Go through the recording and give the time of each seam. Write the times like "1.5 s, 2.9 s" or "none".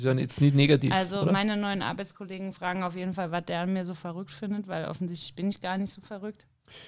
none